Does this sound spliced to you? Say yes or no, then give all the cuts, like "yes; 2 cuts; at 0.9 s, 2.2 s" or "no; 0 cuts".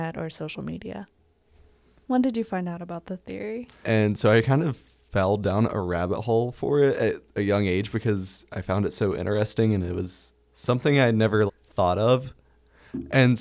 yes; 2 cuts; at 3.8 s, 11.5 s